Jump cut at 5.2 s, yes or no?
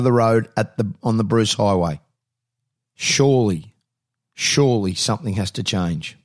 no